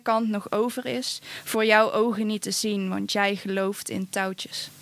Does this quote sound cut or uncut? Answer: uncut